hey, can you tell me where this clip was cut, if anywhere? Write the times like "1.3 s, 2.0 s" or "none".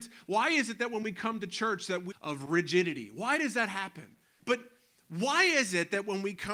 2.1 s, 4.4 s